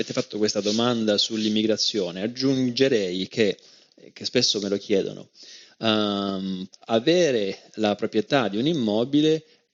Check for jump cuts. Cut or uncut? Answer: cut